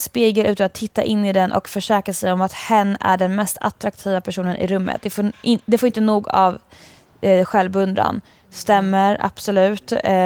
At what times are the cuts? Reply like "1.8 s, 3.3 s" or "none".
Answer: none